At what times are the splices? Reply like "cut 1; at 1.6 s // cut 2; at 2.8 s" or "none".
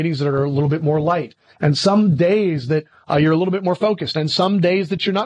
none